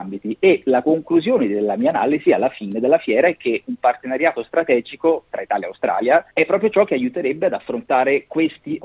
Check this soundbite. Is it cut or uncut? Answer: cut